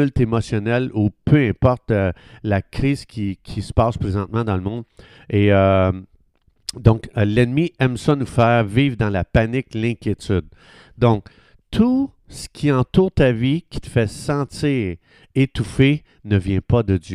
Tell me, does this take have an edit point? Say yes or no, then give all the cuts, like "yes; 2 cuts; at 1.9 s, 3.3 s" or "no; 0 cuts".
no; 0 cuts